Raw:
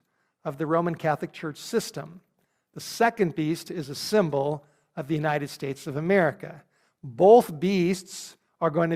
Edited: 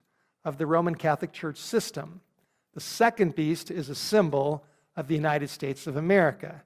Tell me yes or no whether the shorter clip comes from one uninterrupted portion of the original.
yes